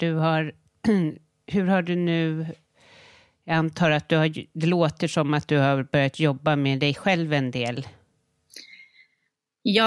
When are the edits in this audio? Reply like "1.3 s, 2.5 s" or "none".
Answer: none